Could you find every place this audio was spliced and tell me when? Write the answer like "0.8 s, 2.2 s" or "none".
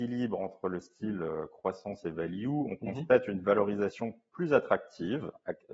none